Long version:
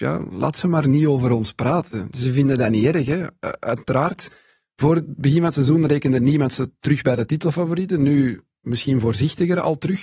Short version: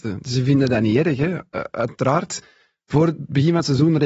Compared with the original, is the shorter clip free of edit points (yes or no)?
yes